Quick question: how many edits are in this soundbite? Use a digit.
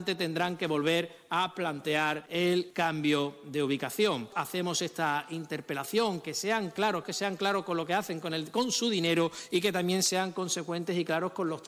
1